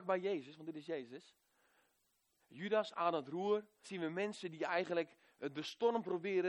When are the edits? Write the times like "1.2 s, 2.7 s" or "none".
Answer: 2.4 s, 3.8 s